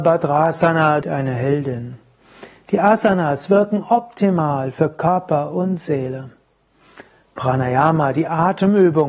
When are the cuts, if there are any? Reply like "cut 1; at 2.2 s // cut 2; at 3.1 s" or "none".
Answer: cut 1; at 1.0 s